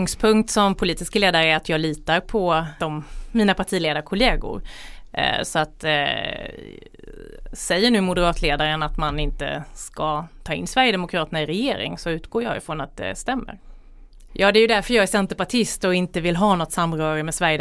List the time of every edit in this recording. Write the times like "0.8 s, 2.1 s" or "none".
2.8 s, 14.3 s